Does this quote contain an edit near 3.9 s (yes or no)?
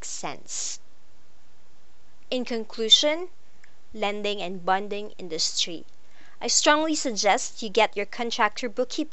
yes